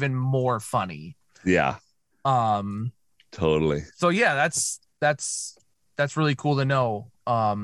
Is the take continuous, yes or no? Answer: yes